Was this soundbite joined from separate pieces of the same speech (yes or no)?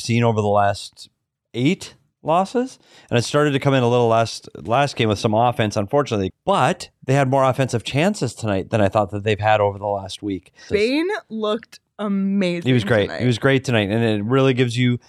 yes